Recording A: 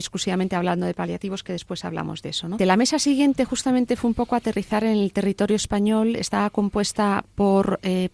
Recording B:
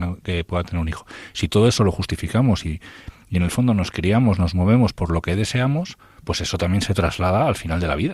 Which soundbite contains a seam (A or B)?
A